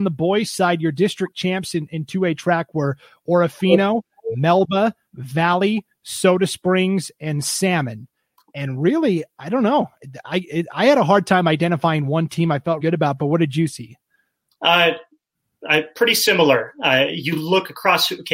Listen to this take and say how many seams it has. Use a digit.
1